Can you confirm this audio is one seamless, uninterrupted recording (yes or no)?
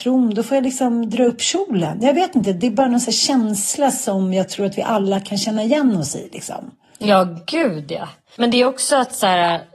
yes